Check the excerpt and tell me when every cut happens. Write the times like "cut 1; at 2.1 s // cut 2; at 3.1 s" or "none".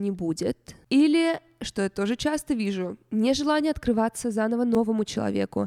none